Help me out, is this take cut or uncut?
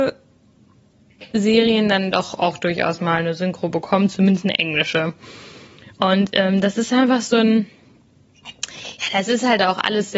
uncut